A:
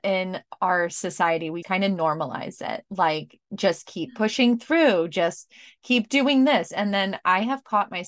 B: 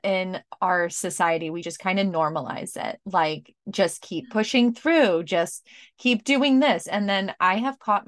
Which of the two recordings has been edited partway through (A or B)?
A